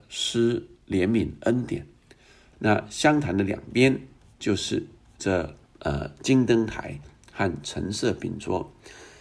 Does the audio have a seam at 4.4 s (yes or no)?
no